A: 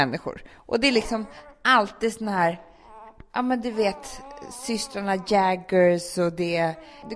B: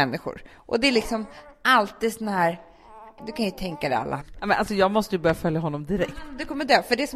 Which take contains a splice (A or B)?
B